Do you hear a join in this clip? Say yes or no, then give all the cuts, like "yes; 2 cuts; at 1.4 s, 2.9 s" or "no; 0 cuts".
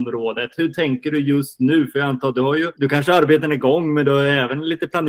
yes; 1 cut; at 2.7 s